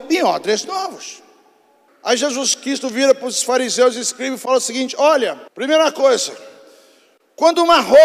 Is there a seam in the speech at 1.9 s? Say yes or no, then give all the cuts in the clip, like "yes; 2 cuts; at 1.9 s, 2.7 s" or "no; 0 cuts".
yes; 2 cuts; at 1.9 s, 5.5 s